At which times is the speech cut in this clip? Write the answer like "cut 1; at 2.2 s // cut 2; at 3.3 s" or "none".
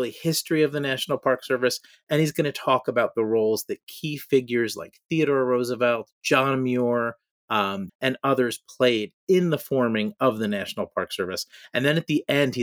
cut 1; at 7.9 s